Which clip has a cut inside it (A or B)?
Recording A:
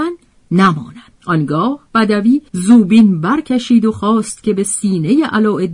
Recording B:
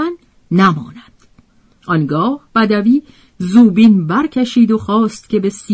A